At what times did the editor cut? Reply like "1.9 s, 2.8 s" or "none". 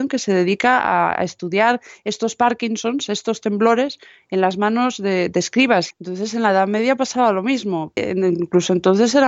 5.9 s, 8.0 s